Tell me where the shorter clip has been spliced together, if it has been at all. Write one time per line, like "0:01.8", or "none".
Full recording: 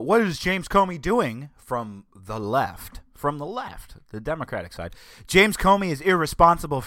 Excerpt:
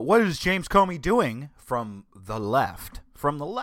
none